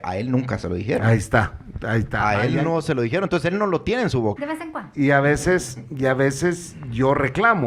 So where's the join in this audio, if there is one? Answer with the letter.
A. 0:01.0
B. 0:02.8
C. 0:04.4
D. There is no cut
C